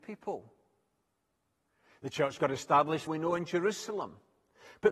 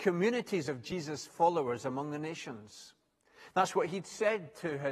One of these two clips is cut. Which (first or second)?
first